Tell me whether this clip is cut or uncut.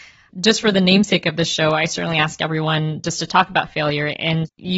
uncut